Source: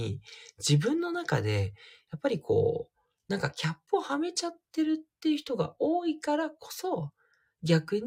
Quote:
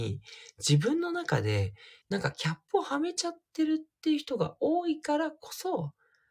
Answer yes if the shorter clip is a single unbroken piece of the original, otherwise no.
no